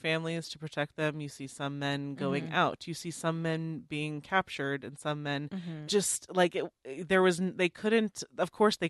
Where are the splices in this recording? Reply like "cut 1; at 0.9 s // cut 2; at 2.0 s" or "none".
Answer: cut 1; at 5.9 s